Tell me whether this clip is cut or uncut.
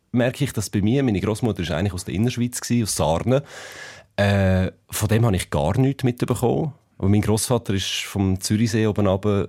uncut